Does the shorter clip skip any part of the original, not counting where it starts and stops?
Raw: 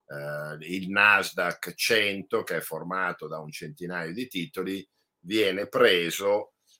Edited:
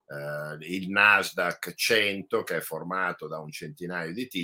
no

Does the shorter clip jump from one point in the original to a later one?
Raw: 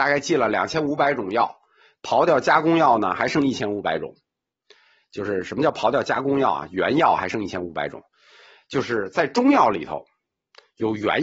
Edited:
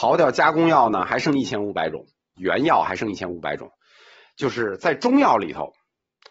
yes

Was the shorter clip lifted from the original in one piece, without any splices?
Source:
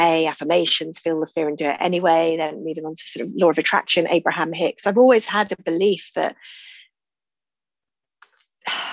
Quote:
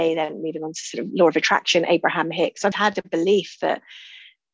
no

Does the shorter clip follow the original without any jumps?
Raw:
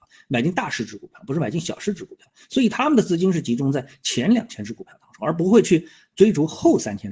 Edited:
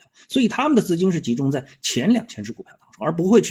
yes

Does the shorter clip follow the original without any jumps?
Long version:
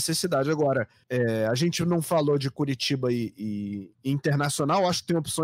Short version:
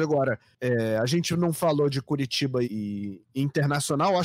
no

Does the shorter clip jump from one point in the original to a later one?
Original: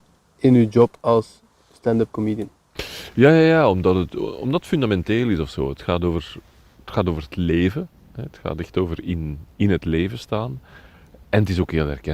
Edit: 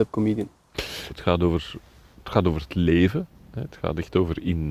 yes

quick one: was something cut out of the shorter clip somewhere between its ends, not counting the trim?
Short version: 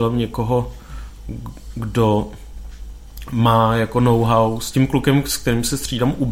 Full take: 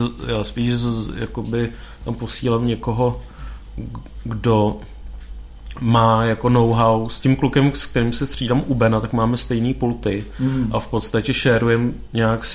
no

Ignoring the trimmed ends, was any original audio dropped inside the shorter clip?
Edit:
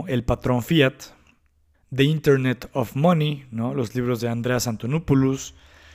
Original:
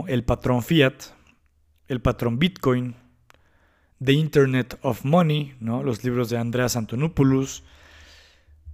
yes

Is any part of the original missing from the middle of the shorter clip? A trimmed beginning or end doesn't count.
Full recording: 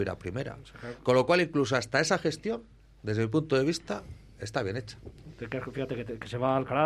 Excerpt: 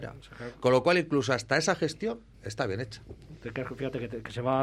yes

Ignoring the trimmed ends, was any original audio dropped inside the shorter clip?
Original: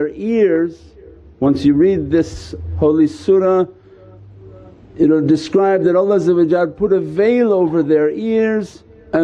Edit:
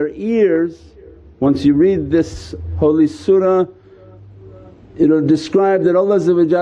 no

